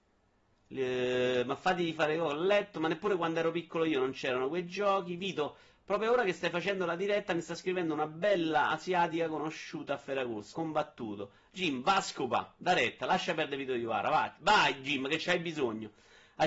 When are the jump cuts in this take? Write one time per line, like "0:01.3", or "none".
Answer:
0:10.5

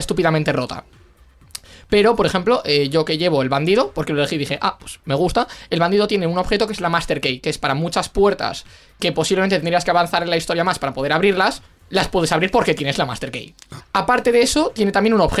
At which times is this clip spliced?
0:13.8

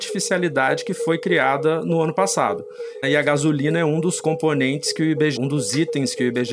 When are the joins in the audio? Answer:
0:03.0
0:05.4

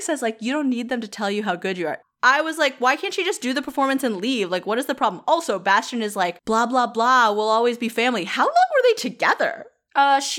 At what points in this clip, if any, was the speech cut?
0:02.0

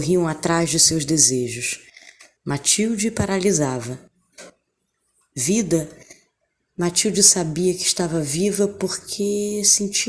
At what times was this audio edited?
0:02.4

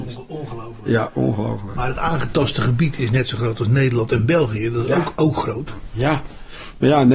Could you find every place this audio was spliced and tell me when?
none

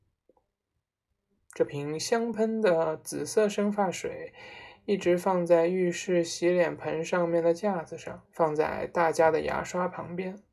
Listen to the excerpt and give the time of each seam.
0:02.3
0:08.3

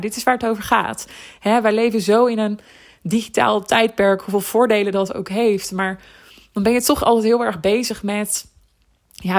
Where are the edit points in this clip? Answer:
none

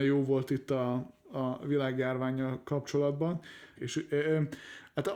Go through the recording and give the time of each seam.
0:03.8

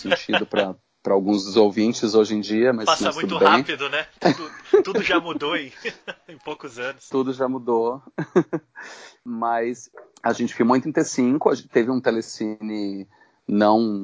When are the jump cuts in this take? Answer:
none

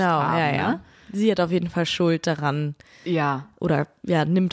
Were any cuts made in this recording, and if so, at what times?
none

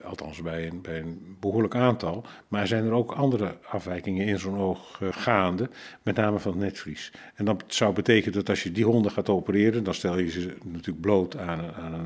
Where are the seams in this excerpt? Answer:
0:05.1

